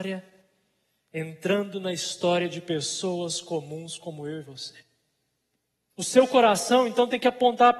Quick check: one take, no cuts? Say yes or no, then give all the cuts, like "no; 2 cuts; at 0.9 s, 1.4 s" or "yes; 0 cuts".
no; 1 cut; at 5.9 s